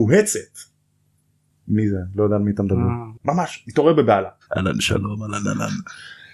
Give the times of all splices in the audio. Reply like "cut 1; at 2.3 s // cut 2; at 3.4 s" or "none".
cut 1; at 1.5 s // cut 2; at 3.2 s // cut 3; at 4.5 s